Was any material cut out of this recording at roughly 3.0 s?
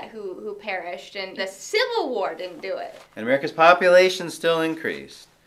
no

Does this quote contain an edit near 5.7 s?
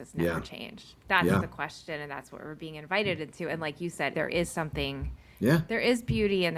no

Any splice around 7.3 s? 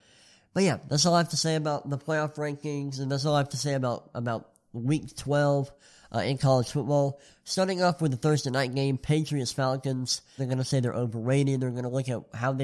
yes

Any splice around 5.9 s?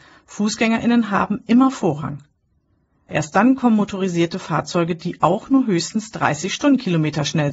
no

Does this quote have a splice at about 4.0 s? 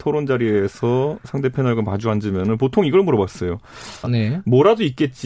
yes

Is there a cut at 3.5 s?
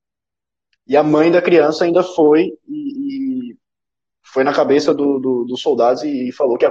no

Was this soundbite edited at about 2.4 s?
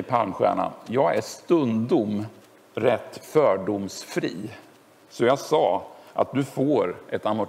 no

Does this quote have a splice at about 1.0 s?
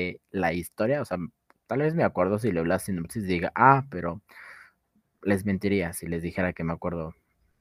no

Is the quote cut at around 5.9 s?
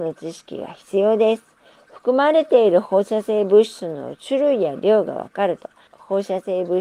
yes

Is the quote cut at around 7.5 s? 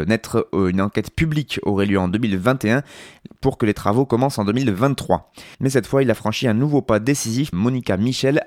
yes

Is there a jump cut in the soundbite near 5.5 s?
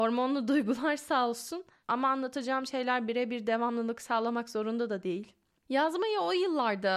yes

